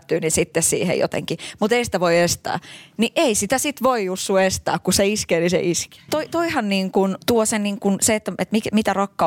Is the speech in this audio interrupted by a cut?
yes; 1 cut; at 6.1 s

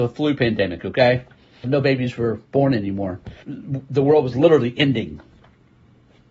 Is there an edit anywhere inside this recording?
yes; 2 cuts; at 1.6 s, 3.4 s

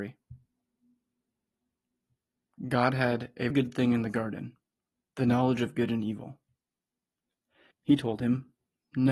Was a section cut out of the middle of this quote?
yes; 2 cuts; at 3.5 s, 7.7 s

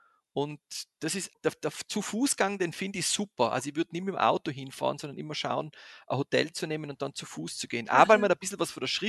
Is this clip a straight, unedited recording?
no; 1 cut; at 1.3 s

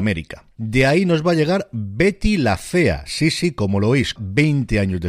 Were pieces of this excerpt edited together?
yes; 1 cut; at 4.2 s

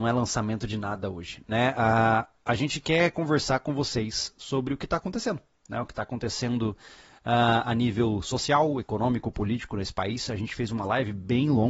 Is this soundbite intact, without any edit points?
yes; 0 cuts

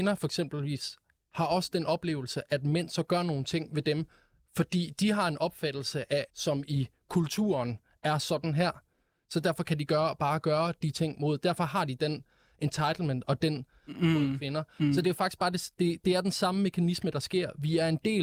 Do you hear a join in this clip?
yes; 2 cuts; at 6.3 s, 13.9 s

